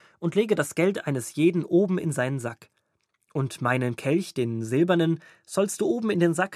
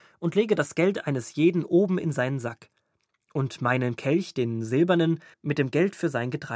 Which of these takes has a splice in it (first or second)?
second